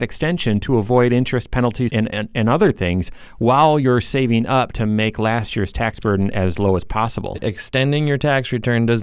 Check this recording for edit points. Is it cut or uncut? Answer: cut